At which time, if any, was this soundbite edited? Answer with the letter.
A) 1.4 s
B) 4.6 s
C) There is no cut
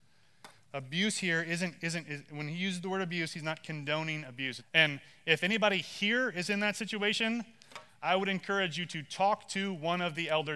B